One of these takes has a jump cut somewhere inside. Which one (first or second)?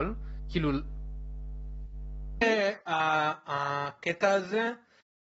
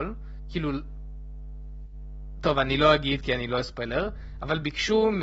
first